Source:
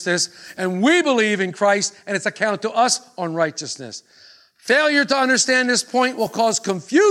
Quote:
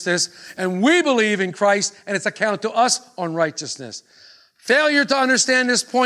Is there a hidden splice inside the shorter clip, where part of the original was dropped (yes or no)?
no